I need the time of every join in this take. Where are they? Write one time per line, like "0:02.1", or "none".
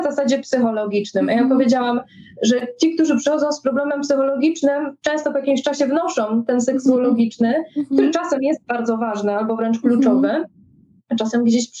none